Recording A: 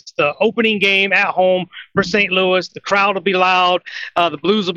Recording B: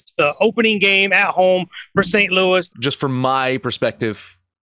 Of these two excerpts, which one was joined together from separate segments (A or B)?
B